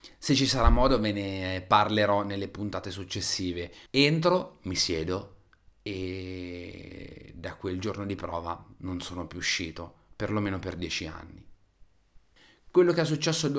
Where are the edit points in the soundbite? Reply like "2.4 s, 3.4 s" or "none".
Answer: 3.9 s